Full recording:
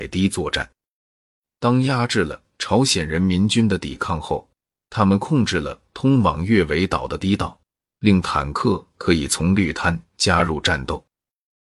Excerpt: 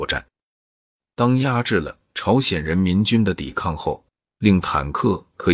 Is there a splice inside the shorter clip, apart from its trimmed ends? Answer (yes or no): yes